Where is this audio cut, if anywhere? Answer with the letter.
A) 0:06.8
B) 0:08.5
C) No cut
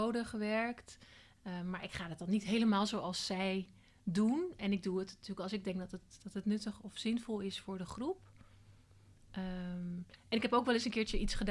A